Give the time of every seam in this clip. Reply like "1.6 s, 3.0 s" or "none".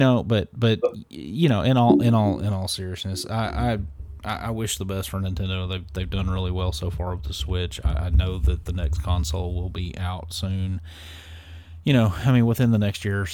none